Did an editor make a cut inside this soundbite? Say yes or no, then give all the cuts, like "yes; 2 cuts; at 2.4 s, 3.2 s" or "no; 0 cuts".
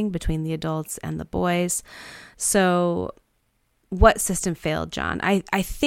no; 0 cuts